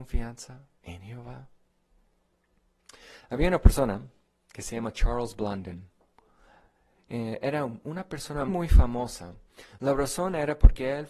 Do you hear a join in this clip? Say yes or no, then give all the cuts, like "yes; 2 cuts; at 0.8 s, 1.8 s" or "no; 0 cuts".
yes; 1 cut; at 8.5 s